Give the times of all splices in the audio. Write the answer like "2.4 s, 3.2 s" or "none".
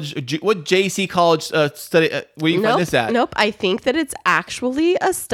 none